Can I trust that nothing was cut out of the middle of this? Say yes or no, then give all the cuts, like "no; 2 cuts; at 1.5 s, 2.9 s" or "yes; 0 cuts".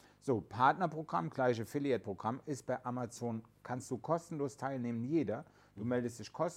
yes; 0 cuts